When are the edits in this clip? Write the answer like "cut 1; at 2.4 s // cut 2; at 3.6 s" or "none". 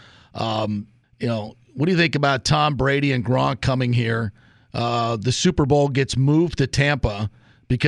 cut 1; at 1.0 s